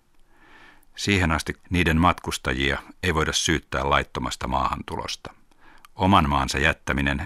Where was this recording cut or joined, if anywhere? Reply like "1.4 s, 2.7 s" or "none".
1.6 s